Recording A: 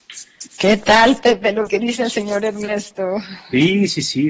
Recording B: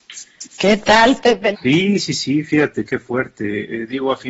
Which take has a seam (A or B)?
B